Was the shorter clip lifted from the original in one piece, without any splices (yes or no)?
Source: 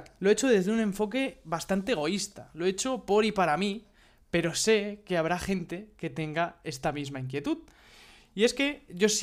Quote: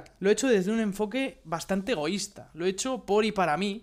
yes